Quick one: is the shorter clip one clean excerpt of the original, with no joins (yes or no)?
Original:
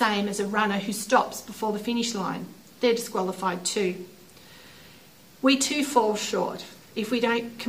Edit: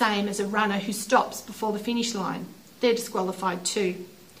yes